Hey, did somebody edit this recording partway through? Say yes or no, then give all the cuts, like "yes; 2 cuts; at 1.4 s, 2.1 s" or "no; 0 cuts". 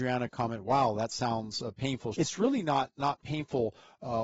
yes; 1 cut; at 2.1 s